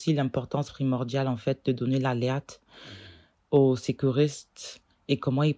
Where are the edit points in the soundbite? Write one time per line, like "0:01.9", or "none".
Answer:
none